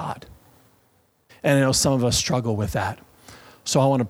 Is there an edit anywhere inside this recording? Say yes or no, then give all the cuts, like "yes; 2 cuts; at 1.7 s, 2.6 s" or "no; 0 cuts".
yes; 1 cut; at 1.3 s